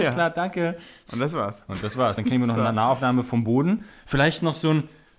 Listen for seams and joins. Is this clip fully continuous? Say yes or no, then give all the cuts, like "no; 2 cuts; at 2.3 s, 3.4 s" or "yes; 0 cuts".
yes; 0 cuts